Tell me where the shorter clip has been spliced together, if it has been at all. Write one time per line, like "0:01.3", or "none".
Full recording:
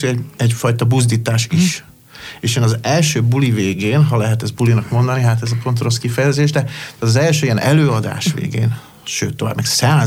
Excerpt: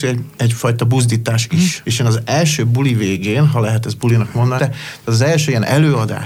0:01.8
0:04.6